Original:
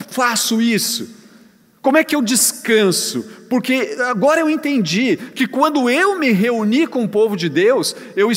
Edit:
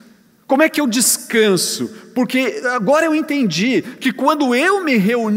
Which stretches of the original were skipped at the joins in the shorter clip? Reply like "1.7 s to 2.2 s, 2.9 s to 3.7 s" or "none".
none